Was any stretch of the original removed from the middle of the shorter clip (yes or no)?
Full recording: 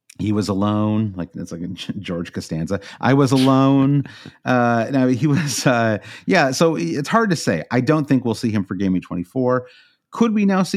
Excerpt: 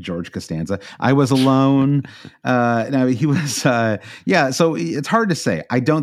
no